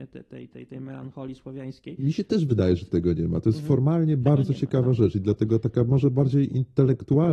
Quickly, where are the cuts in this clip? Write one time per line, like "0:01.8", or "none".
none

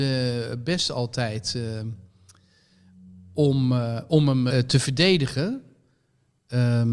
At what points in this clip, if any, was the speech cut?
0:04.5

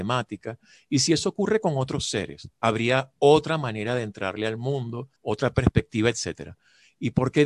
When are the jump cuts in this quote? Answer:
0:05.2

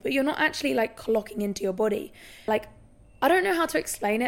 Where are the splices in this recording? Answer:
0:02.5

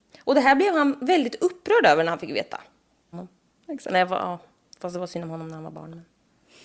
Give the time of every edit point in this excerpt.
0:03.1

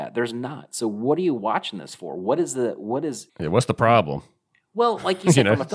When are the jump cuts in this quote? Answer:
0:03.3

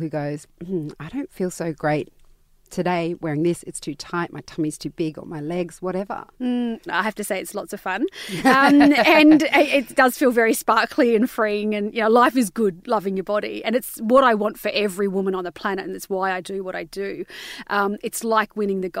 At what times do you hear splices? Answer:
0:06.9

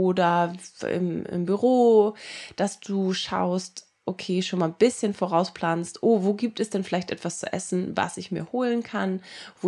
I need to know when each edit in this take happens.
none

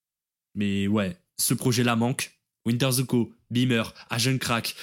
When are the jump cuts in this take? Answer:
0:02.5

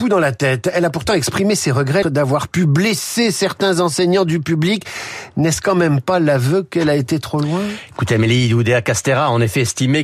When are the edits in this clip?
0:02.0

